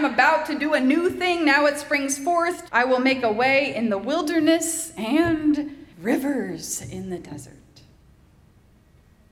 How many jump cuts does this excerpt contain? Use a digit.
2